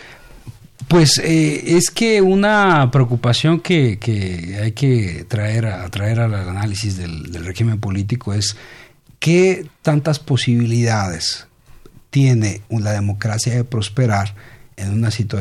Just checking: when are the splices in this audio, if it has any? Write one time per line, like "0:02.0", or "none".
none